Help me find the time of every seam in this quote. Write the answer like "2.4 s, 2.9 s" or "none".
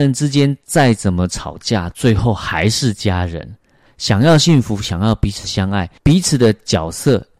3.9 s, 6.0 s